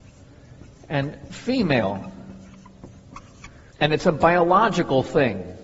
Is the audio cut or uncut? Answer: cut